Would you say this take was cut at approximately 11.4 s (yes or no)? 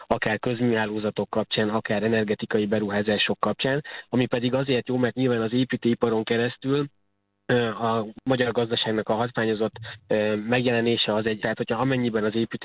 yes